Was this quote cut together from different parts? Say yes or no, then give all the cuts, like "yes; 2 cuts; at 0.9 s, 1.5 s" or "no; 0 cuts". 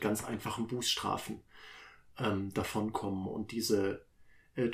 no; 0 cuts